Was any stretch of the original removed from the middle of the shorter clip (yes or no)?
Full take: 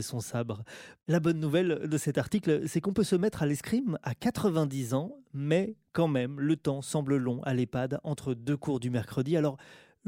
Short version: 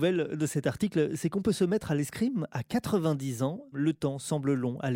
yes